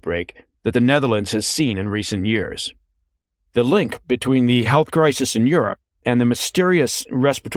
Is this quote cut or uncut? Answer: uncut